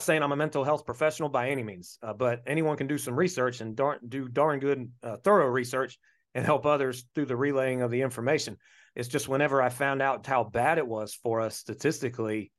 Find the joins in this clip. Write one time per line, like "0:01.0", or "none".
0:08.9
0:10.2